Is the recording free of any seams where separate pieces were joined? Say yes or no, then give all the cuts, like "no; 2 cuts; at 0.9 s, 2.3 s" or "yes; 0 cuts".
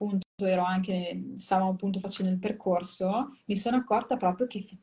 yes; 0 cuts